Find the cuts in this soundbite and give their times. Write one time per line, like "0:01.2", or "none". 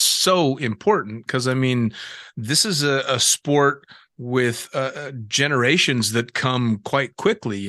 none